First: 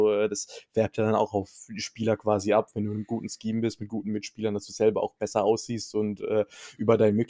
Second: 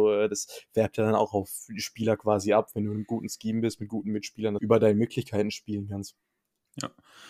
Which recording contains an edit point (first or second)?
second